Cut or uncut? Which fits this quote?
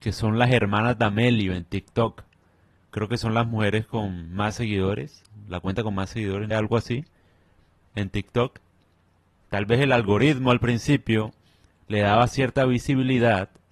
cut